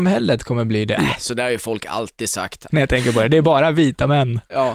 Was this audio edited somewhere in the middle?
yes; 2 cuts; at 1.0 s, 2.7 s

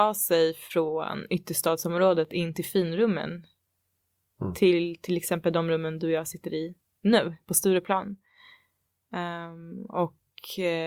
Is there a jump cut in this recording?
no; 0 cuts

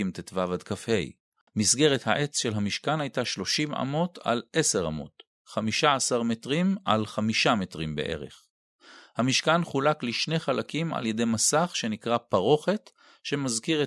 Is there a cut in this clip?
yes; 1 cut; at 1.5 s

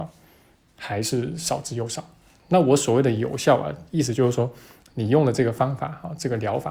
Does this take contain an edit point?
no; 0 cuts

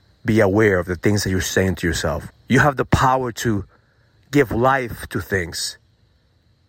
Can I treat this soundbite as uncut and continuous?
no; 1 cut; at 2.3 s

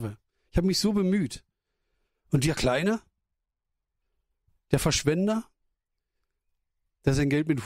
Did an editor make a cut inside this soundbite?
no; 0 cuts

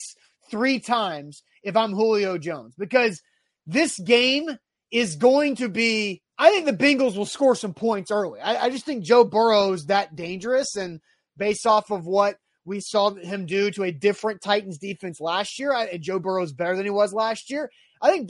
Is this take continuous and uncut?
no; 1 cut; at 6.3 s

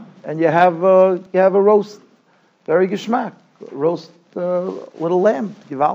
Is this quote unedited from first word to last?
yes; 0 cuts

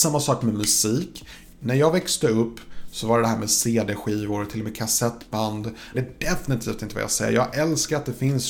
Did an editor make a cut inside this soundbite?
yes; 1 cut; at 5.9 s

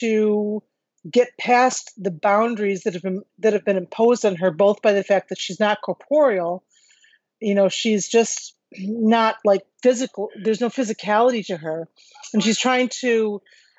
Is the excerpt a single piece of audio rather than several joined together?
yes; 0 cuts

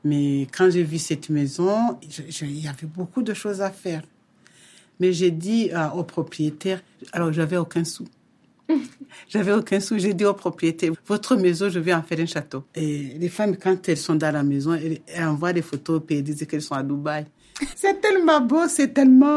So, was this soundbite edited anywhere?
yes; 3 cuts; at 10.9 s, 12.7 s, 17.7 s

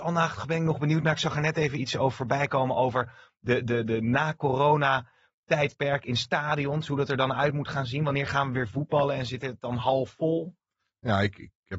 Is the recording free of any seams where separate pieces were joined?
yes; 0 cuts

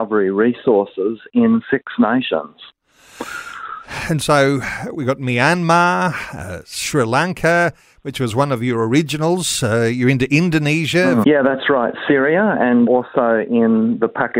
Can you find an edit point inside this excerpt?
yes; 2 cuts; at 11.2 s, 12.9 s

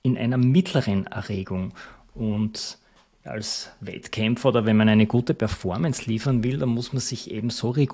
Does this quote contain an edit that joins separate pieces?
no; 0 cuts

